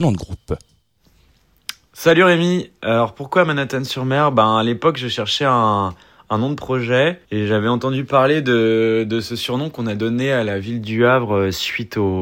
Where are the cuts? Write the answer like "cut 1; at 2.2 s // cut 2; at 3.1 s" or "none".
cut 1; at 7.2 s